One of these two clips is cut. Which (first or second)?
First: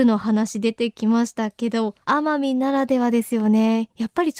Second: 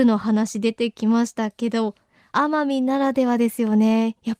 first